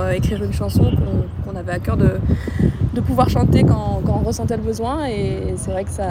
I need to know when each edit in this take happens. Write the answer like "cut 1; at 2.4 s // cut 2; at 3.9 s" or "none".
none

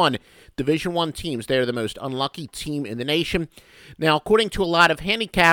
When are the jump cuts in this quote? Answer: none

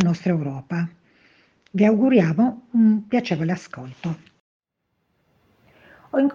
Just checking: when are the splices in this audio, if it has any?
none

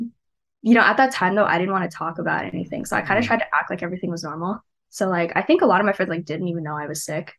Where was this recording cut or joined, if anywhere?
none

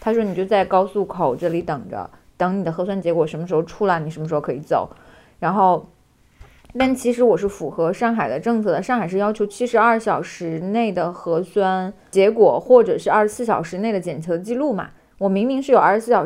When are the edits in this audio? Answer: none

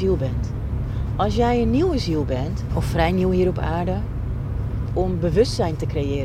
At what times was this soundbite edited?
cut 1; at 2.7 s // cut 2; at 4.9 s

